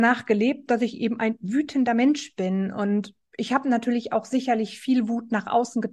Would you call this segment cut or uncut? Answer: uncut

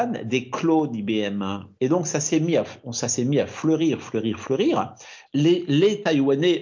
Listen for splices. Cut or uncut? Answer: cut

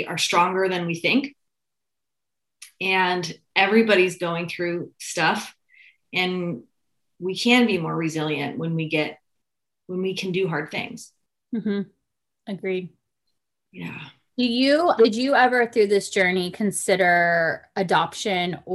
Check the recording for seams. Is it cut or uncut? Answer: cut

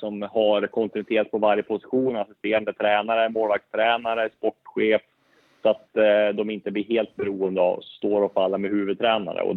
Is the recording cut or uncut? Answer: uncut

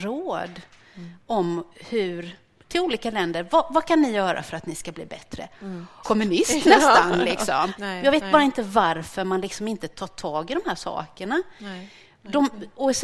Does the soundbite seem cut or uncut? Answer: cut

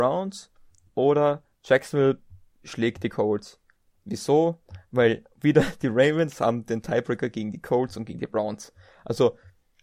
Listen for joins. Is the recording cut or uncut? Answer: uncut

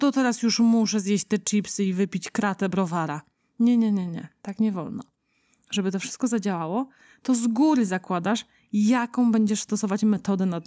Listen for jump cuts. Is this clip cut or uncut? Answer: uncut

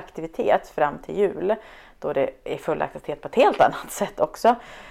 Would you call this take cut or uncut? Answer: uncut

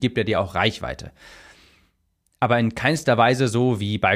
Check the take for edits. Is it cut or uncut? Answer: uncut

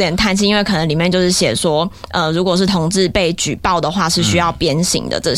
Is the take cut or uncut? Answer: uncut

